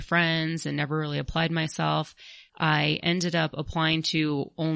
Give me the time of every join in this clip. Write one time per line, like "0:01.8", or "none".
0:02.5